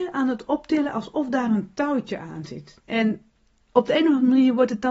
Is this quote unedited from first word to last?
no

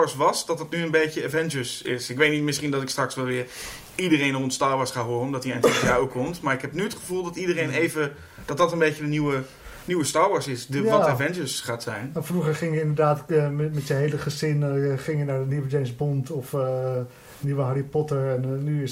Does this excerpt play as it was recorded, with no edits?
yes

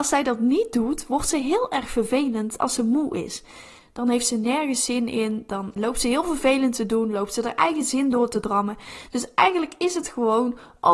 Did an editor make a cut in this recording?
yes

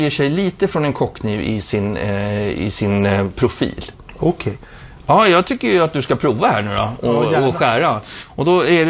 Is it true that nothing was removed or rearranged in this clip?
yes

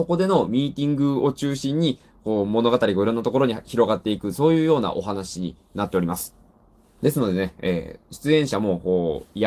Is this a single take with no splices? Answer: yes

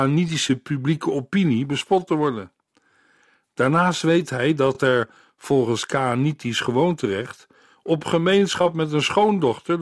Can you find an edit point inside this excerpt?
no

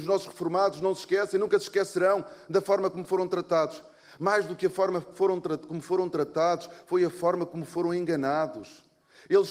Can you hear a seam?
no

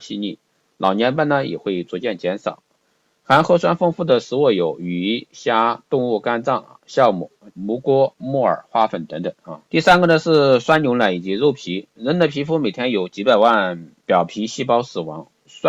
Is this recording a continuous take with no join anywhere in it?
no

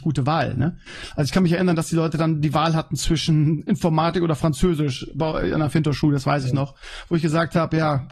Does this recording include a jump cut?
no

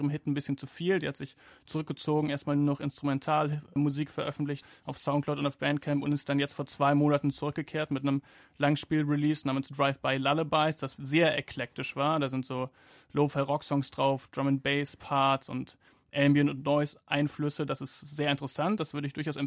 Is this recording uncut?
no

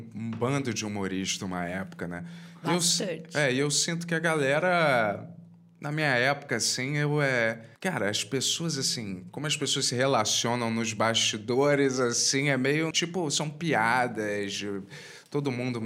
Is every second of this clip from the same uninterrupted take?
no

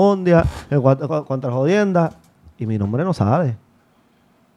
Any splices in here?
no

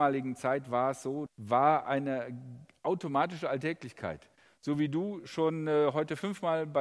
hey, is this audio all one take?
no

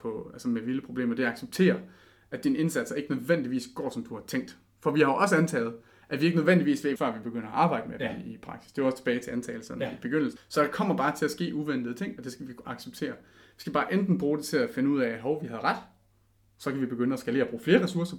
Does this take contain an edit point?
yes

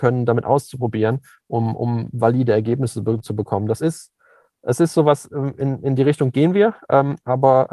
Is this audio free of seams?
yes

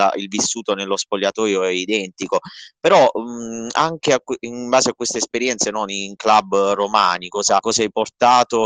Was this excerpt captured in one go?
no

